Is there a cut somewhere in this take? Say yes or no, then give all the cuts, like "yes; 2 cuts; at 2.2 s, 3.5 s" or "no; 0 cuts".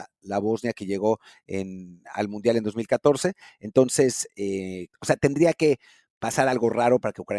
yes; 1 cut; at 4.9 s